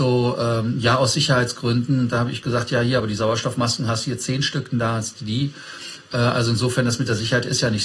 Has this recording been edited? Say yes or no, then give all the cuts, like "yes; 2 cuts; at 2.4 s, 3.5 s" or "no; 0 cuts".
no; 0 cuts